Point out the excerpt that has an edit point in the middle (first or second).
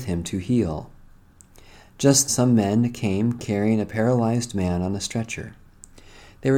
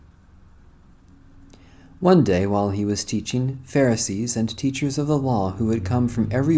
first